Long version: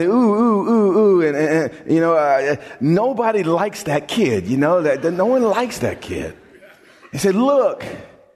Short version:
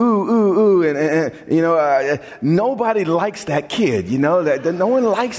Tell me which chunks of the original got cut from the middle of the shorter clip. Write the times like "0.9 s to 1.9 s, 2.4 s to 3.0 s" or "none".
none